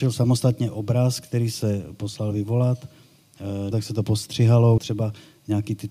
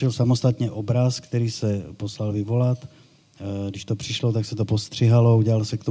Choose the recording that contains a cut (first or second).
first